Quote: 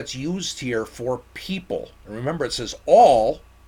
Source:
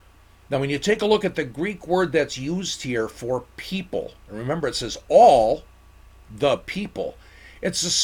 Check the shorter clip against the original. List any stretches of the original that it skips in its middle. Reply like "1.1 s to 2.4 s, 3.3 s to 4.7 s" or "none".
none